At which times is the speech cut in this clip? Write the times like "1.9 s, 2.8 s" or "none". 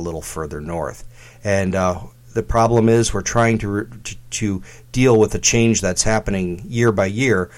none